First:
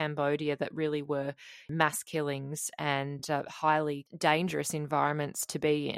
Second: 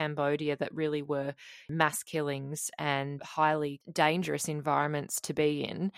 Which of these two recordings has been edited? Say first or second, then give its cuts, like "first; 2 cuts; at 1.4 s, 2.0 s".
second; 1 cut; at 3.2 s